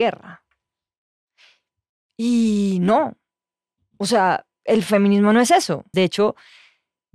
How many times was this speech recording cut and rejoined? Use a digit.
1